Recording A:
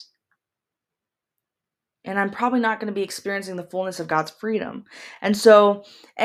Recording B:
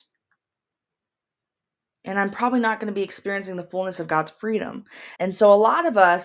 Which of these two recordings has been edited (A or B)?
B